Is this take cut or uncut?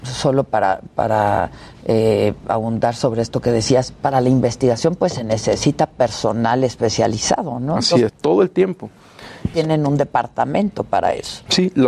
cut